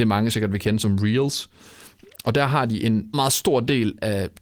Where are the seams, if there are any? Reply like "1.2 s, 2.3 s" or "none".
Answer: 3.1 s